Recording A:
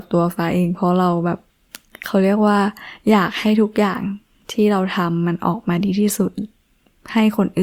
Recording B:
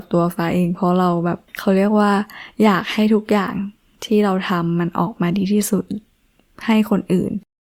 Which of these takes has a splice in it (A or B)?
B